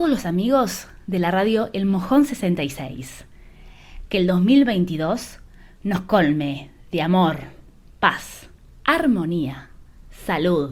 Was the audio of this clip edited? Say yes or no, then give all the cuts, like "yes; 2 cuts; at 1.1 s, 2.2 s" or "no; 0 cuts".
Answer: no; 0 cuts